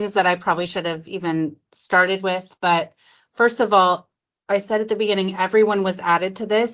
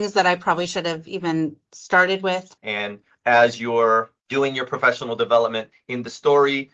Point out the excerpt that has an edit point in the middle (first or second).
second